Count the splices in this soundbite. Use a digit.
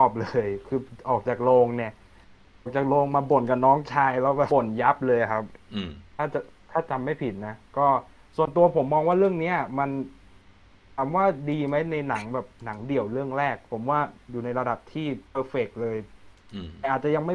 2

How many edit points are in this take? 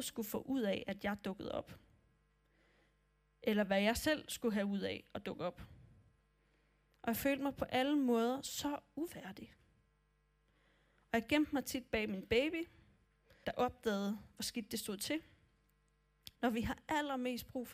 2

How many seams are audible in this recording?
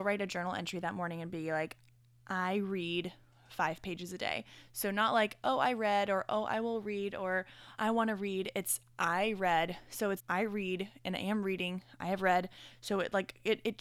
2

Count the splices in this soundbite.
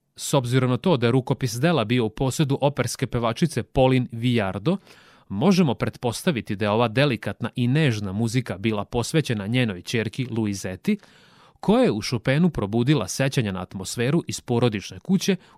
0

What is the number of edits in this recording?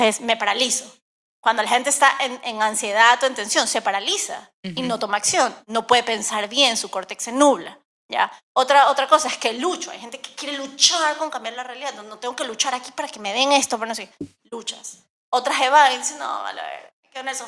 0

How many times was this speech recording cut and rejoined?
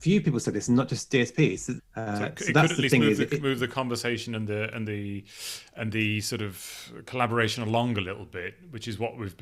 1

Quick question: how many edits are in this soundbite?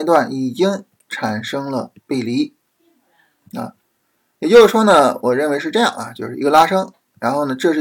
0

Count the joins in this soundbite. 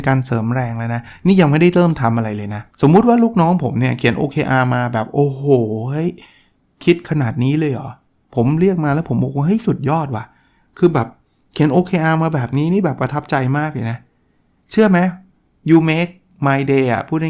1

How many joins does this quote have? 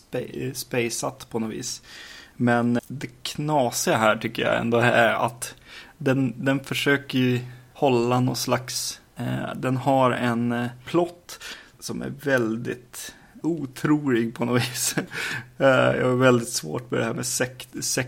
1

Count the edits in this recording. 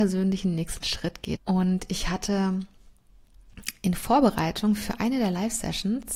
1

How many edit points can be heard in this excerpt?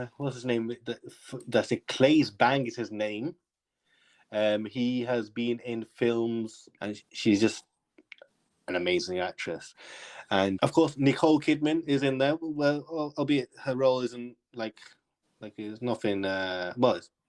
2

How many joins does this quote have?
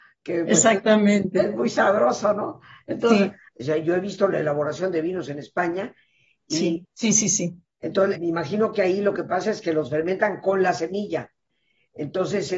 3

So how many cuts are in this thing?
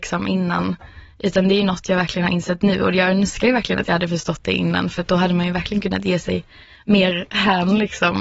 0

